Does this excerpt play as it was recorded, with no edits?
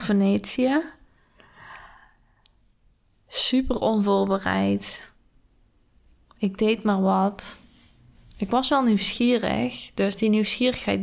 yes; 0 cuts

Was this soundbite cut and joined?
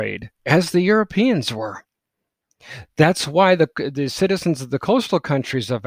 no; 0 cuts

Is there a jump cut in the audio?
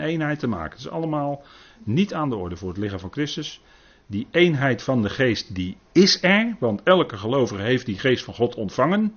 no; 0 cuts

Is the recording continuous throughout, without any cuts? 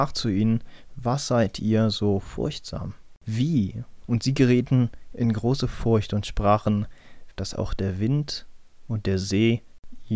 no; 2 cuts; at 4.0 s, 7.3 s

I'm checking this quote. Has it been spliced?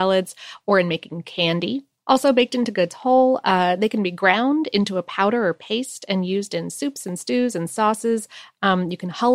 yes; 1 cut; at 2.0 s

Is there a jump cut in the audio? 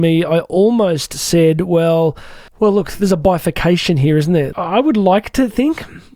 yes; 2 cuts; at 2.5 s, 4.5 s

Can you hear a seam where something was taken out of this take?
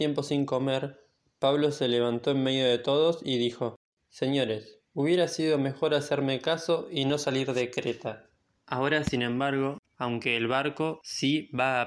yes; 2 cuts; at 8.6 s, 9.8 s

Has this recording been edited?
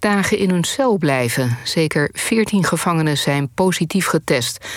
no; 0 cuts

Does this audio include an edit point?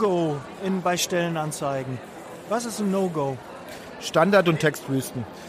no; 0 cuts

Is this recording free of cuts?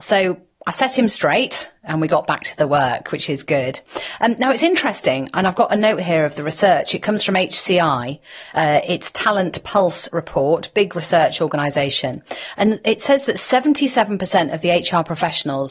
yes; 0 cuts

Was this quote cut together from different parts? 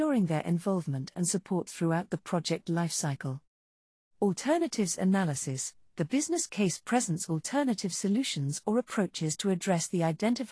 no; 0 cuts

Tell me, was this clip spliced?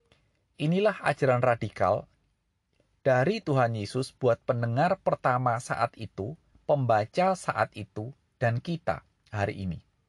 no; 0 cuts

